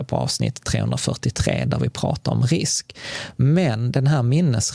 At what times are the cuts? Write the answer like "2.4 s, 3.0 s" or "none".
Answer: none